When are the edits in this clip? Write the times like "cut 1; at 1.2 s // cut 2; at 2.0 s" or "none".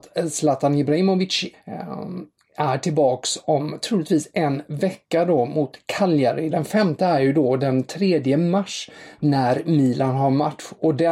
cut 1; at 1.5 s // cut 2; at 6.5 s